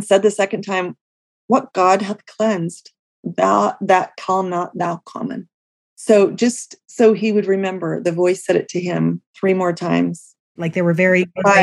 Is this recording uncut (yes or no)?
no